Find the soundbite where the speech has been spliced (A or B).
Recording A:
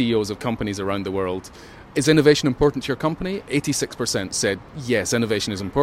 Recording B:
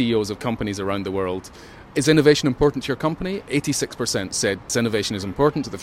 B